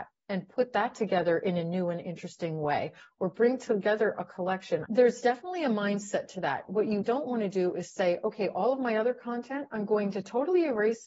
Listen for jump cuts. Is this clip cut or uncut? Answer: cut